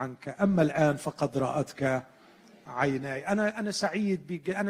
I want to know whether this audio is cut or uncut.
uncut